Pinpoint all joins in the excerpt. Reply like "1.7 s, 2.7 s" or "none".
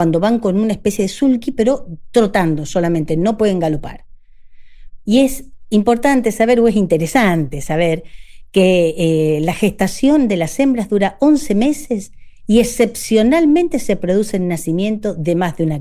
5.0 s